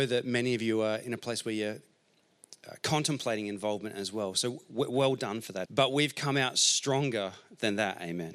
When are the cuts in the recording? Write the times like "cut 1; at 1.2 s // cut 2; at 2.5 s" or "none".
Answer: cut 1; at 5.7 s